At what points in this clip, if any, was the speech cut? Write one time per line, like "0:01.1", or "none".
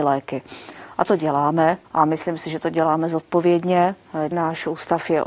0:01.8
0:04.3